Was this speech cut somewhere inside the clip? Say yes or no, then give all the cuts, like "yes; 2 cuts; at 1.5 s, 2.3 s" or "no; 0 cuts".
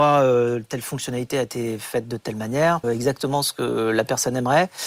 yes; 1 cut; at 2.8 s